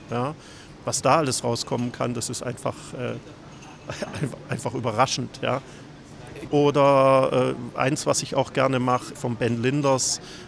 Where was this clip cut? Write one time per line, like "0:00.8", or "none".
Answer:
0:06.5
0:09.1